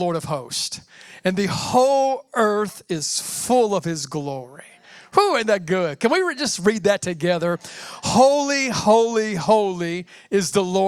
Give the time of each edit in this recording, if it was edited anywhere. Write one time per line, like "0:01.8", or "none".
none

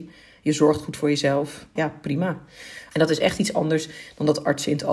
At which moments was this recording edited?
0:01.8
0:02.9

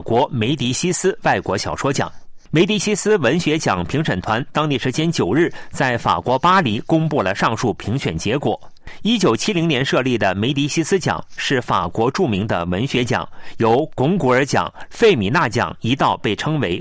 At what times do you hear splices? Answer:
0:14.9

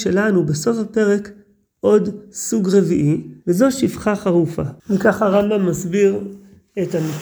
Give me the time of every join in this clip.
0:03.4
0:04.8

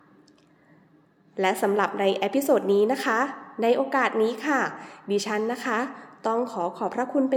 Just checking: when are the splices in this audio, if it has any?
none

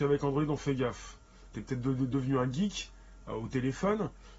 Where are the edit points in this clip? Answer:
0:01.5
0:03.3

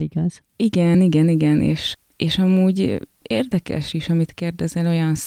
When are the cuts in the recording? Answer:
none

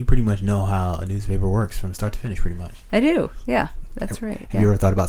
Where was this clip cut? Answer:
none

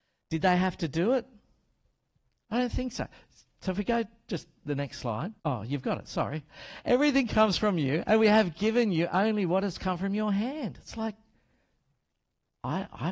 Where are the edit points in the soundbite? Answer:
0:05.4

